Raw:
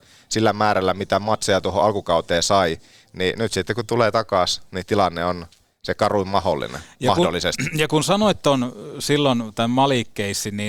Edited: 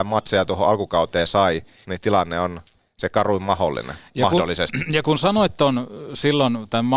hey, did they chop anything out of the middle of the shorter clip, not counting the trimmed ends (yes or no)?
yes